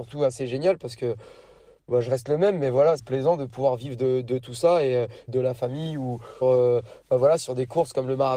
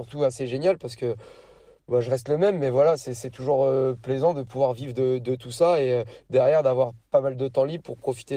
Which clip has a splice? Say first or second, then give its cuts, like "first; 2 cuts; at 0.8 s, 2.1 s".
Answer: first; 3 cuts; at 3.0 s, 5.3 s, 6.4 s